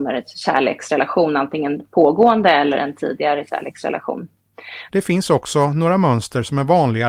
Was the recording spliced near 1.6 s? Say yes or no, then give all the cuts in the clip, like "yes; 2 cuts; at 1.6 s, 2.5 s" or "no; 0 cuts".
no; 1 cut; at 4.9 s